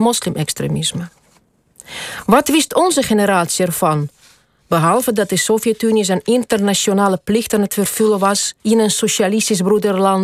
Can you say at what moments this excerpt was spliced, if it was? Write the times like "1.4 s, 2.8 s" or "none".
8.6 s